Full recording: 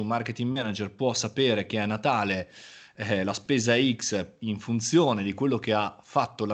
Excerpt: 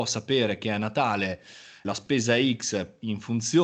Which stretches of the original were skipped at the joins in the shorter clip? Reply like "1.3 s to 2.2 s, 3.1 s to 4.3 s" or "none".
2.9 s to 3.2 s